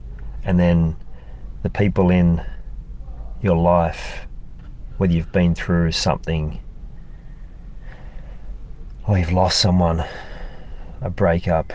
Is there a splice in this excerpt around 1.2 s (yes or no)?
no